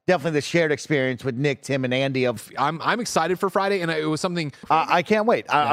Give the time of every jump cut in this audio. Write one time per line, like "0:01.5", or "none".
0:02.4
0:04.6